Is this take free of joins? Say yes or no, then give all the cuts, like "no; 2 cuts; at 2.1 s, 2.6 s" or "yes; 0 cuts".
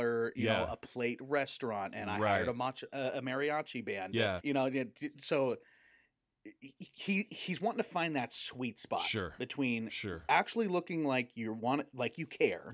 no; 1 cut; at 4.4 s